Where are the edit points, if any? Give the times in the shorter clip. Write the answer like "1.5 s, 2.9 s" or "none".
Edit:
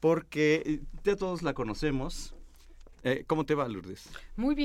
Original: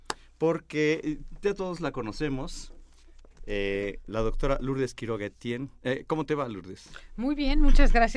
3.0 s